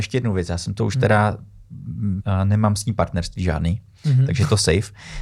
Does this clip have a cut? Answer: yes; 1 cut; at 2.2 s

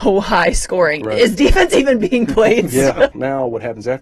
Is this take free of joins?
no; 1 cut; at 3.1 s

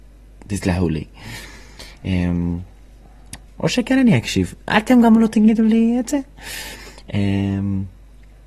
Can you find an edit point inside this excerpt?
yes; 1 cut; at 3.5 s

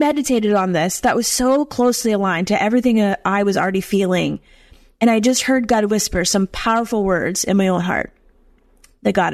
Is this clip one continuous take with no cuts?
yes; 0 cuts

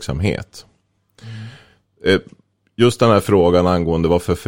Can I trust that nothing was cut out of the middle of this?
yes; 0 cuts

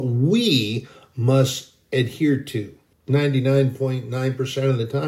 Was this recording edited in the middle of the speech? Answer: yes; 1 cut; at 2.9 s

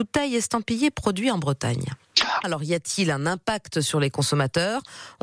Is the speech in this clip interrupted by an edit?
yes; 1 cut; at 2.4 s

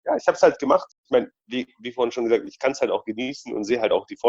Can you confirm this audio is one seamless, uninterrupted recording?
no; 1 cut; at 0.9 s

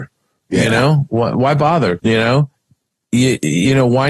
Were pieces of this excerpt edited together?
yes; 1 cut; at 2.0 s

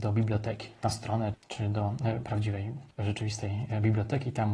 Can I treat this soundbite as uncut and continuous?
no; 2 cuts; at 1.3 s, 2.9 s

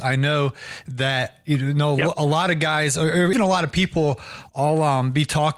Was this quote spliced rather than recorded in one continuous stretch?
yes; 1 cut; at 3.3 s

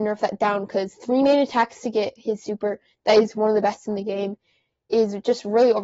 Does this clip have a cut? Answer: no; 0 cuts

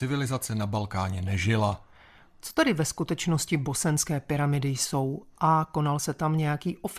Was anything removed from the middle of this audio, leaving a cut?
no; 0 cuts

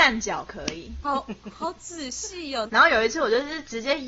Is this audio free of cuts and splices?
no; 2 cuts; at 1.0 s, 2.7 s

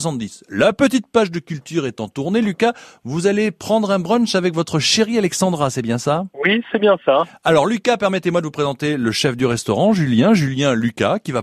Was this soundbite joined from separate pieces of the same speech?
no; 0 cuts

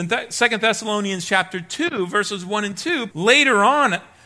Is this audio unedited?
no; 1 cut; at 3.1 s

